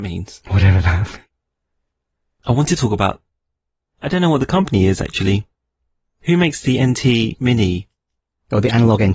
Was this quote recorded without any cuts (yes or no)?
yes